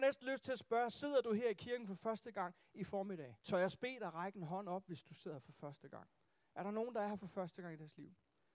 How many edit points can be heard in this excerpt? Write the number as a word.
one